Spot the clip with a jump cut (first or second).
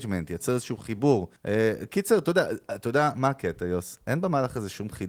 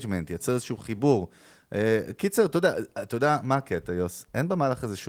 first